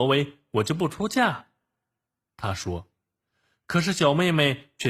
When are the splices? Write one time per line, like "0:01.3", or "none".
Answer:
none